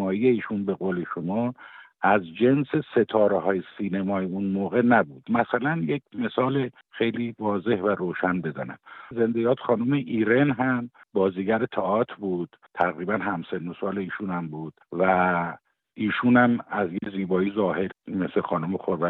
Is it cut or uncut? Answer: uncut